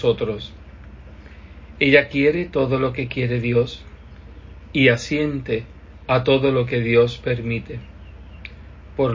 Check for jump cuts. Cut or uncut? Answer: uncut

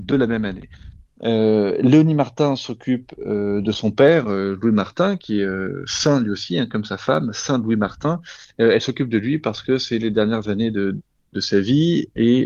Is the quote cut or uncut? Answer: cut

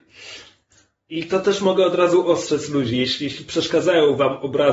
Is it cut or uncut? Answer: uncut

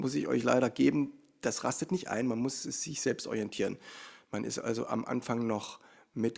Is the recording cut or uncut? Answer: uncut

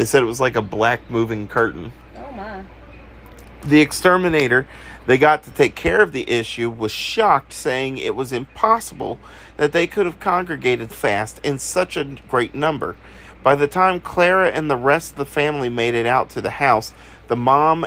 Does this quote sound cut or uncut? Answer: cut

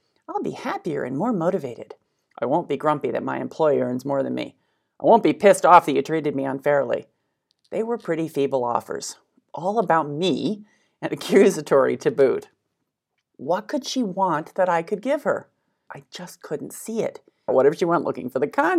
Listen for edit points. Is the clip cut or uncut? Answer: cut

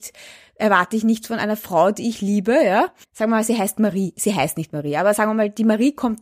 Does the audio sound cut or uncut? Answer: cut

